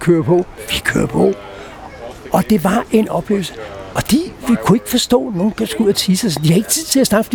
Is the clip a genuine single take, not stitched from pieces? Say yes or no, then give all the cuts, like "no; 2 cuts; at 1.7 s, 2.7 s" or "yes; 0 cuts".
yes; 0 cuts